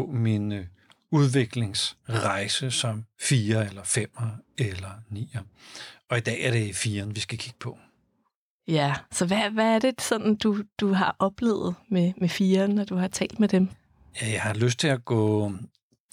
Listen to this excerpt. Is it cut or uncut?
uncut